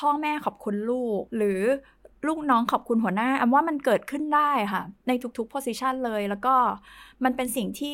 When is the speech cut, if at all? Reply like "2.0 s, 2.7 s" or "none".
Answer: 1.3 s